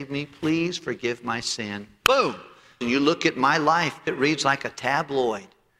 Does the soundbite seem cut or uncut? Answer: cut